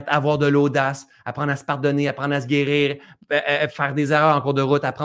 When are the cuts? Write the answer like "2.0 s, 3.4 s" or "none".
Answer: none